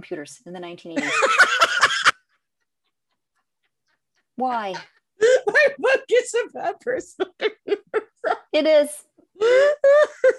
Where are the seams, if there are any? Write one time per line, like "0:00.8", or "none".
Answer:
0:08.5

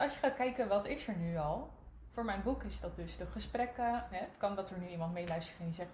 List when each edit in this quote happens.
0:04.1

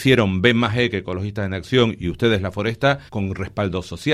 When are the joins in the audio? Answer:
0:03.1

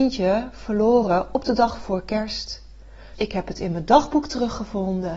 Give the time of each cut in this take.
0:03.1

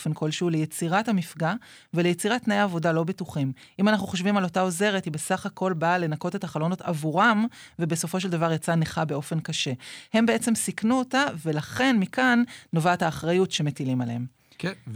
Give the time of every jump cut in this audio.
none

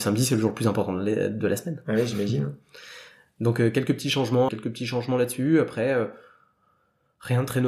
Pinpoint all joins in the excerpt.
0:04.5

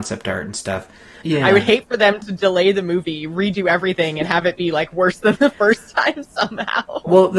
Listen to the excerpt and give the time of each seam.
0:01.2

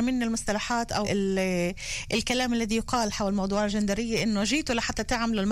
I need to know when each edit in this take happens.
0:01.0

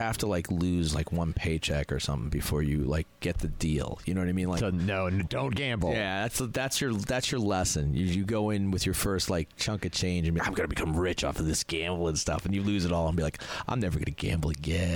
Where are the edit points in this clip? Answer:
0:10.4

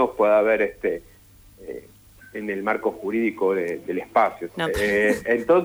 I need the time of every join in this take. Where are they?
0:02.2
0:04.5

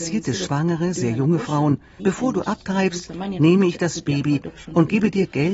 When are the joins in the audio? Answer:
0:02.0

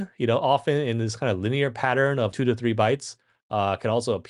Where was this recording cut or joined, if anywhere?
0:02.3

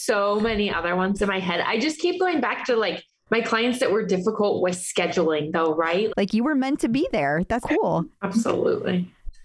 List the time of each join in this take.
0:06.1
0:07.6

